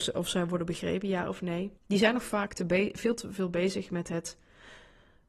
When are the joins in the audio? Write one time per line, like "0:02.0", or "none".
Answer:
0:01.8